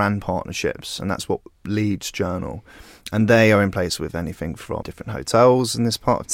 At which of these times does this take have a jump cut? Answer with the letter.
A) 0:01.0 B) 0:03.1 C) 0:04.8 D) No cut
C